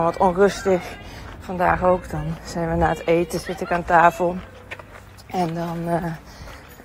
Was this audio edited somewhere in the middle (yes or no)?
no